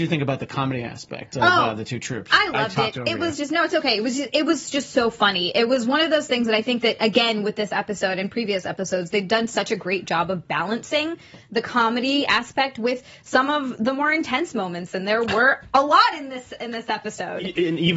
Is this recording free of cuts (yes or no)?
yes